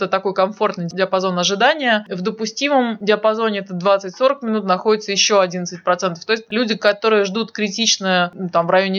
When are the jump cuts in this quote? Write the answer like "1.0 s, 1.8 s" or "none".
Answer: 6.5 s